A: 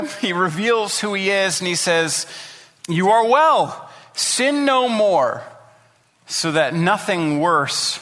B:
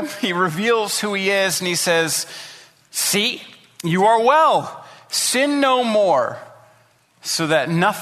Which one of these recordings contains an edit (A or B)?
A